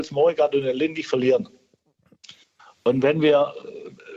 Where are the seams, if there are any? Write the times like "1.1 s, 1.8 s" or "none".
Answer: none